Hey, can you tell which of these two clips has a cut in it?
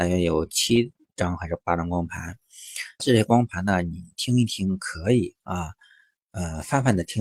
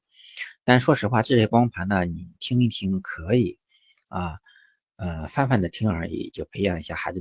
first; 2 cuts; at 3.0 s, 5.4 s

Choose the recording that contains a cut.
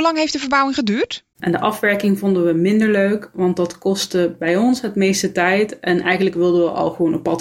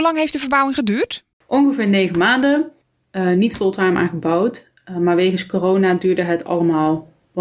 first; 1 cut; at 1.3 s

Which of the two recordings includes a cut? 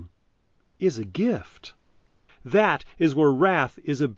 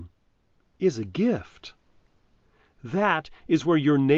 first; 1 cut; at 2.3 s

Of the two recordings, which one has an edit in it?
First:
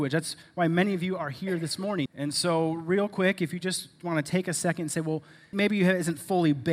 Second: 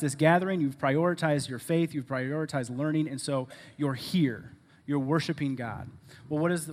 first; 2 cuts; at 2.1 s, 5.5 s

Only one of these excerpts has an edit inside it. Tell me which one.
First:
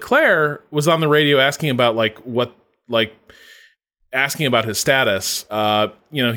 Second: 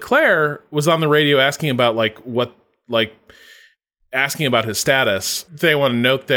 second; 1 cut; at 5.5 s

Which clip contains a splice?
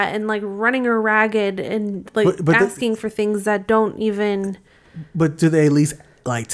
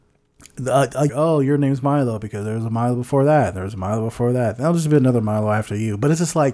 second; 1 cut; at 1.1 s

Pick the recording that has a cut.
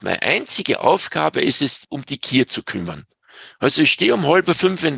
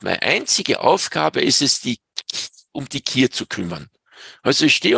first; 1 cut; at 1.8 s

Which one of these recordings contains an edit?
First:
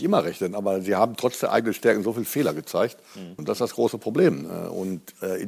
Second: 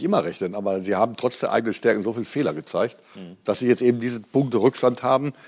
first; 1 cut; at 3.4 s

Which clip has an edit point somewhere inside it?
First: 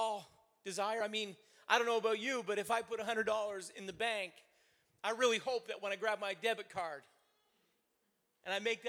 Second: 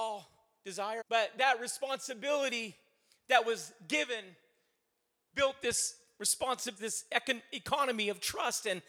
second; 2 cuts; at 1.0 s, 6.8 s

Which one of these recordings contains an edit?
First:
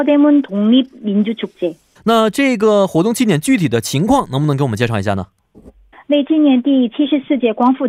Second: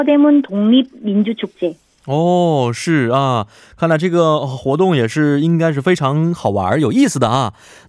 first; 2 cuts; at 2.0 s, 5.9 s

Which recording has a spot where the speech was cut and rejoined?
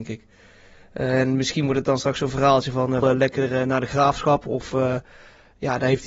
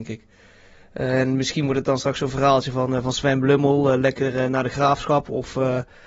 first; 1 cut; at 3.0 s

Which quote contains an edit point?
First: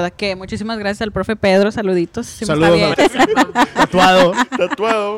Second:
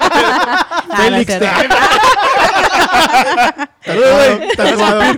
first; 1 cut; at 2.9 s

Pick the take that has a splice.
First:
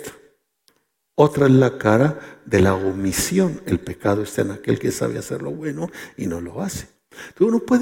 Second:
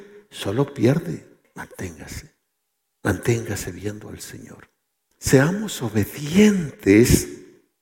second; 2 cuts; at 1.4 s, 5.1 s

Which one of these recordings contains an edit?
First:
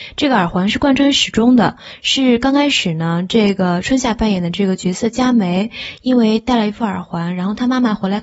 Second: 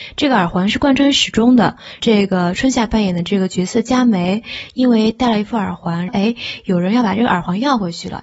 second; 2 cuts; at 2.0 s, 6.1 s

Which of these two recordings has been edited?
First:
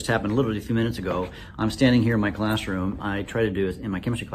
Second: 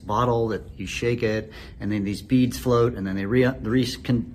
first; 1 cut; at 3.0 s

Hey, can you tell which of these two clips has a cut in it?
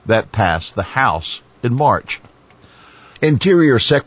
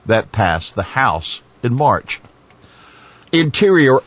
first; 1 cut; at 3.2 s

